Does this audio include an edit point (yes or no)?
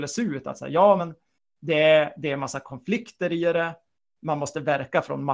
no